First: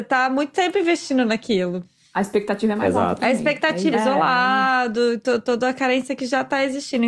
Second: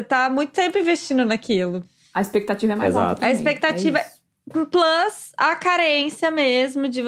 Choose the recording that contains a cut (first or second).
first